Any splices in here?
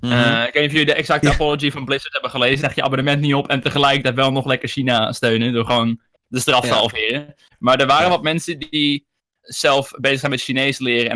yes; 2 cuts; at 2.6 s, 9.4 s

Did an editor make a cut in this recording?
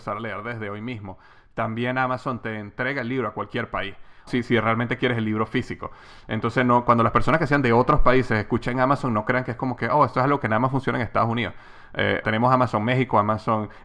yes; 2 cuts; at 4.3 s, 12.2 s

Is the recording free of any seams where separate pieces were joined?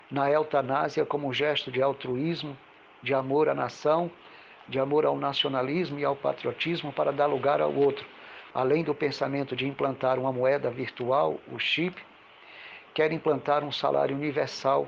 no; 1 cut; at 8.5 s

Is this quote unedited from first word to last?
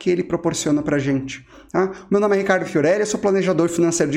yes; 0 cuts

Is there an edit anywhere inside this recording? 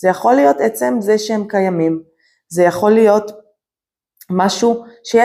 no; 0 cuts

